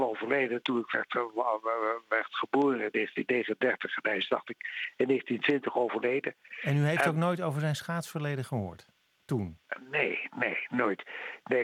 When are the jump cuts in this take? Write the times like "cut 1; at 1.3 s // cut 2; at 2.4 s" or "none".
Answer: none

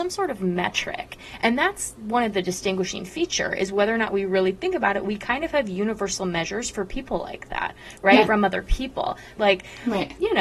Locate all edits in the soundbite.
cut 1; at 8.3 s // cut 2; at 9.4 s

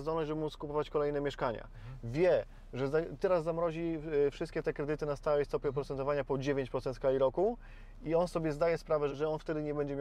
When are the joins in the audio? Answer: cut 1; at 9.1 s

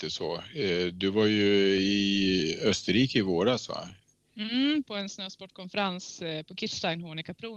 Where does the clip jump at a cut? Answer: cut 1; at 4.8 s

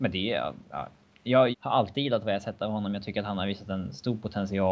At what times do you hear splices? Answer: cut 1; at 1.5 s

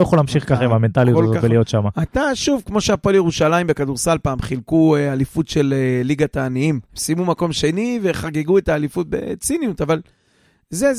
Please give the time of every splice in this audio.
cut 1; at 6.9 s

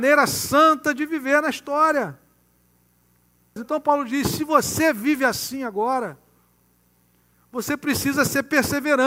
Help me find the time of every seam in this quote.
cut 1; at 3.6 s

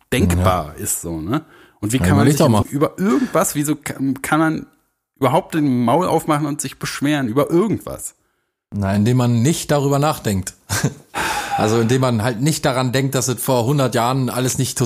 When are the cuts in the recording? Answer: cut 1; at 2.6 s

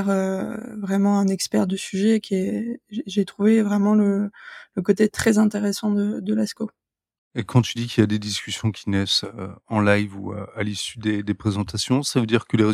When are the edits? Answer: cut 1; at 7.2 s

